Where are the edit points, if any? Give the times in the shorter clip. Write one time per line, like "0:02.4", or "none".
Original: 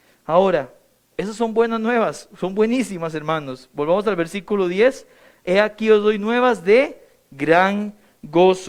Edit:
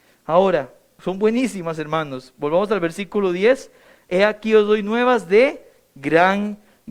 0:01.0